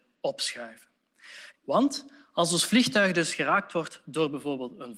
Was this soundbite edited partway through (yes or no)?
yes